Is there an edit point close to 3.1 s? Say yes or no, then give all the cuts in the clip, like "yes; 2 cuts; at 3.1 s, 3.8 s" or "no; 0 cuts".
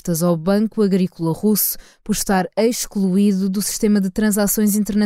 no; 0 cuts